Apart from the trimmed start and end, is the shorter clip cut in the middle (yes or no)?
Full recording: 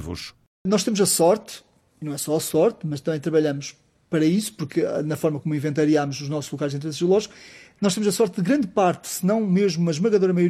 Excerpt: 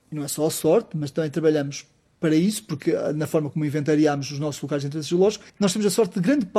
yes